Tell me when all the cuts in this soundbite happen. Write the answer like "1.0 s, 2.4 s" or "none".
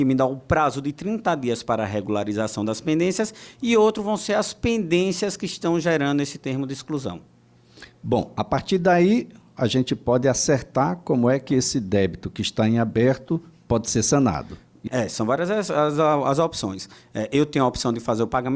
14.9 s